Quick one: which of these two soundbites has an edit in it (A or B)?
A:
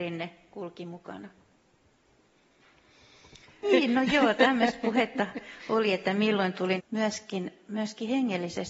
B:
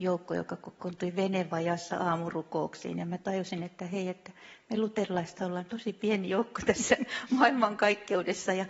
A